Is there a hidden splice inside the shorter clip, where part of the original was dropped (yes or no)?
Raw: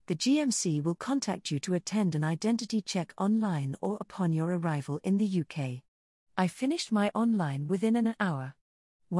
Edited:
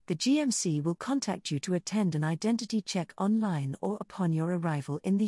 no